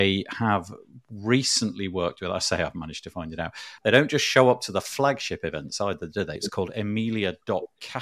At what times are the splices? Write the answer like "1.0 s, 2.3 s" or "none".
3.8 s, 6.4 s